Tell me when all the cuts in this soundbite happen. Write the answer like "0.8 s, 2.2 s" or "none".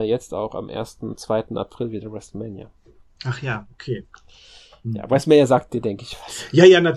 none